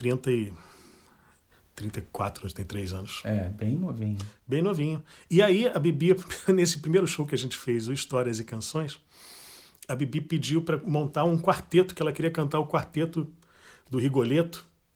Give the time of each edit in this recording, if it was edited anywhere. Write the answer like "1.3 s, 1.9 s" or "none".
none